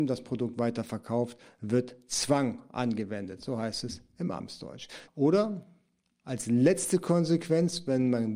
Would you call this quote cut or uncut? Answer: cut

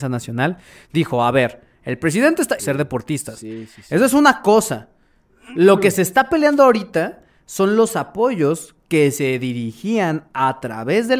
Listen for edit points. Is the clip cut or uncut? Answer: cut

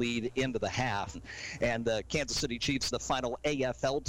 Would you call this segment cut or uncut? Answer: cut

